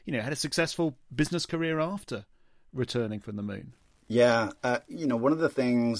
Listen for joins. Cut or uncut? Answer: uncut